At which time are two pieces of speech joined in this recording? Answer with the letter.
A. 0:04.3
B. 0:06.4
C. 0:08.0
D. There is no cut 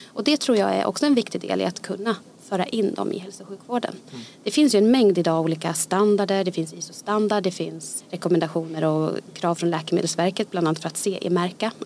C